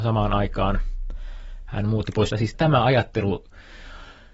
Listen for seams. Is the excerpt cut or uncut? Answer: cut